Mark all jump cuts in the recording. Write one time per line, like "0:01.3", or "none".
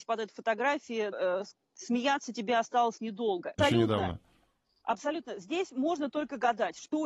0:01.1
0:03.6